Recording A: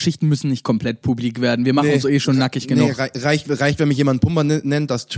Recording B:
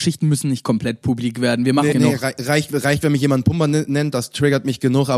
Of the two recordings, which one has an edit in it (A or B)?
B